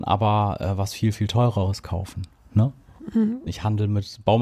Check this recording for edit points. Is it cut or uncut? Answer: cut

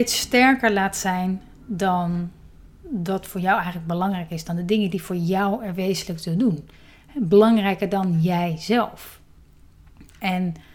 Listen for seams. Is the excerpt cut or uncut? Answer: uncut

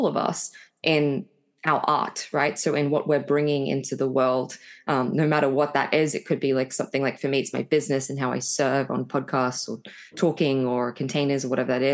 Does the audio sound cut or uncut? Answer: uncut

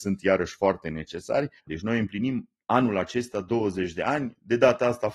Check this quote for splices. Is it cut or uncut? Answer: cut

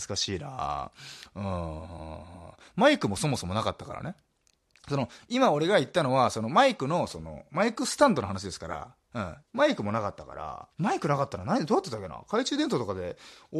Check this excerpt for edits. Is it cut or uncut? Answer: cut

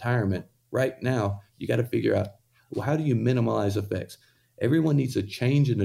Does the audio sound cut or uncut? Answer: uncut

